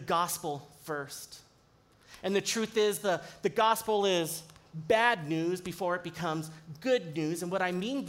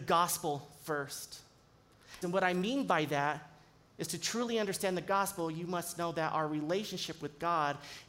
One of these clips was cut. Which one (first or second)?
second